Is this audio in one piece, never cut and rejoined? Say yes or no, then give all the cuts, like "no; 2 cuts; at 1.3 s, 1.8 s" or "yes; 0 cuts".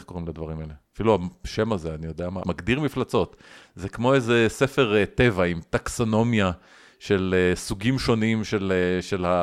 no; 1 cut; at 2.4 s